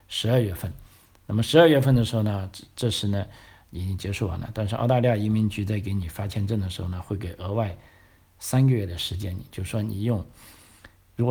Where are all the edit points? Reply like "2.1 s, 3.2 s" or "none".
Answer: none